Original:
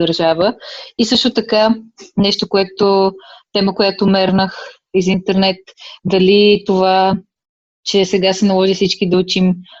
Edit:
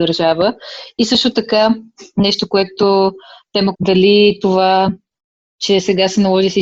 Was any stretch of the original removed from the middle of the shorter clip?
yes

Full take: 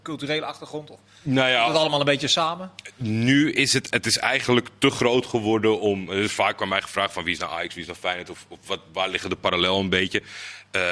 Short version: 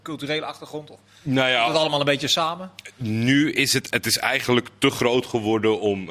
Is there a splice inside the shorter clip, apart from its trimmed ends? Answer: no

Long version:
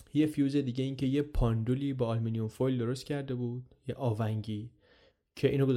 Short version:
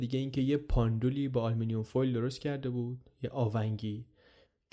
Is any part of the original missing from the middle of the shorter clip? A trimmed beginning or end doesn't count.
no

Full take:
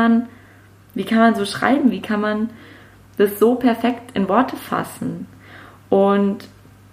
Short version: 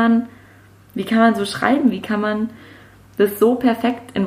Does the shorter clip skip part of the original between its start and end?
no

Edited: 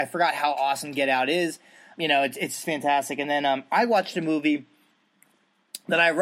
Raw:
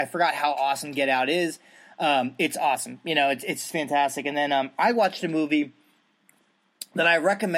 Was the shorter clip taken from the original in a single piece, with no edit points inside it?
no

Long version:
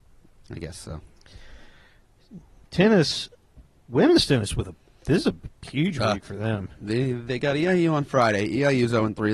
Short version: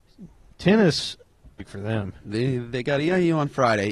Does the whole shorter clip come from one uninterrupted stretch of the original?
no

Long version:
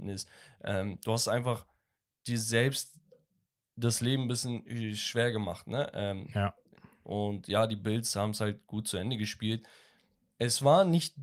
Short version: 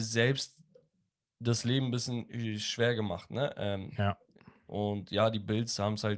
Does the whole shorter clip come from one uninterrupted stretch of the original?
yes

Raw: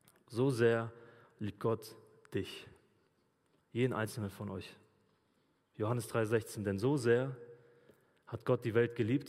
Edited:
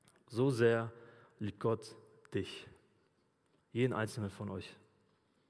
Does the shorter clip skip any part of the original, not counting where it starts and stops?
no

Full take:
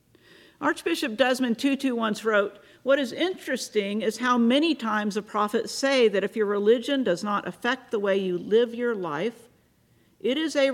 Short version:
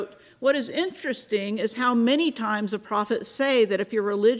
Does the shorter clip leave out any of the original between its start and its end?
no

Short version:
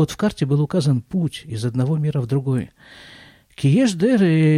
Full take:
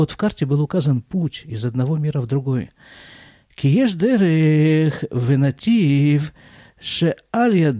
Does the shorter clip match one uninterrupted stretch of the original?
yes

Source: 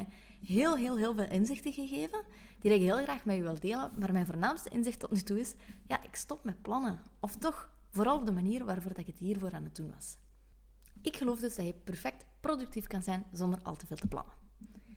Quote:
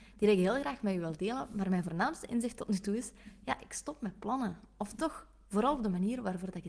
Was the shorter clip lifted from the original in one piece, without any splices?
yes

